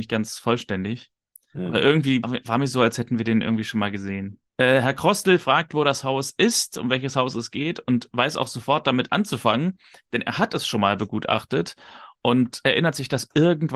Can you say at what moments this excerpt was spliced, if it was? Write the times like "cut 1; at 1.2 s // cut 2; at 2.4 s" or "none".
cut 1; at 2.2 s // cut 2; at 4.5 s